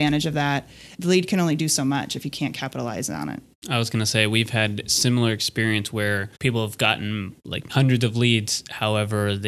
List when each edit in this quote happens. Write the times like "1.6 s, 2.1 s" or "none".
1.0 s, 6.3 s, 7.7 s